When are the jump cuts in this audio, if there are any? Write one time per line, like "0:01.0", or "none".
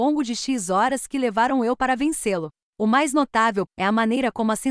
0:03.7